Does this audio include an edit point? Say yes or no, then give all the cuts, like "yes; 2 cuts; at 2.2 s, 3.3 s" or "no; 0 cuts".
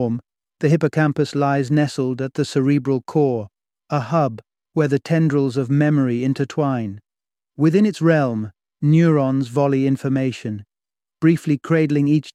yes; 1 cut; at 7.5 s